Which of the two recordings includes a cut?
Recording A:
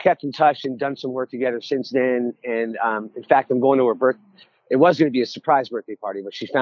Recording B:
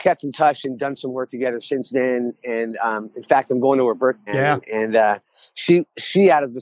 B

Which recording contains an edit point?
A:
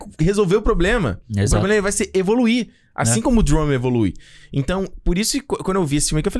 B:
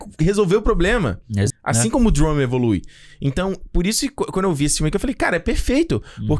B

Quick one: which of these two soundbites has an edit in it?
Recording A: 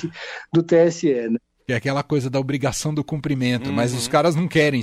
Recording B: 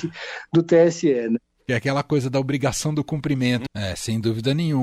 B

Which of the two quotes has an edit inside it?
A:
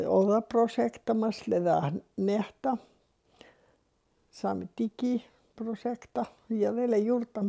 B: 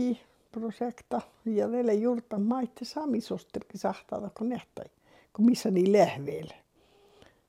B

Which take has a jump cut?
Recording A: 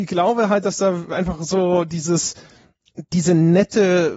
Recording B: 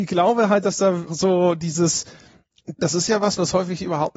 B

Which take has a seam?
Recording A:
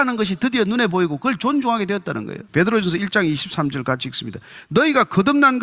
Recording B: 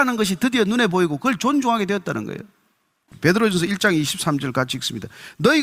A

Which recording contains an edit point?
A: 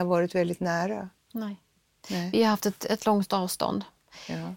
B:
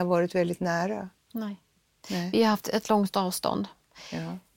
B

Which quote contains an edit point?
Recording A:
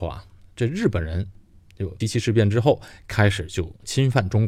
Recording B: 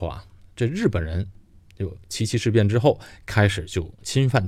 A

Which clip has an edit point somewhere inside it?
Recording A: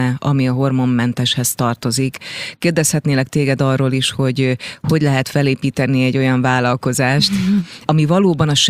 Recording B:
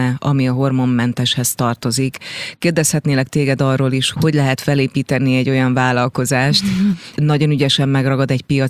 B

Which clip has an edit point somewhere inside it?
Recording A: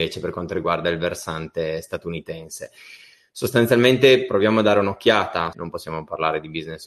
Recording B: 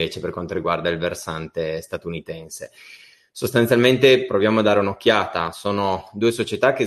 A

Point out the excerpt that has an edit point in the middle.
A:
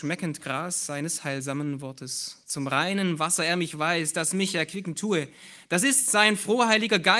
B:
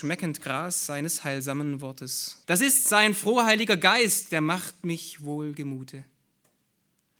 B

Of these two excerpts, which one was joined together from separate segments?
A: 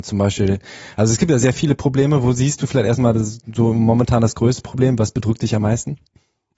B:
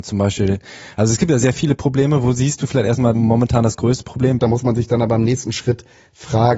B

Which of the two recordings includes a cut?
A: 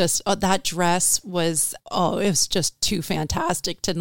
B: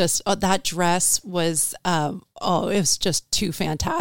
A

